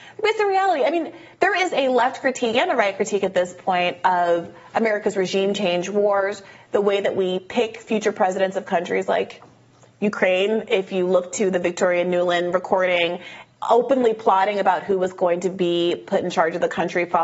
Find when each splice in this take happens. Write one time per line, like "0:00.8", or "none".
none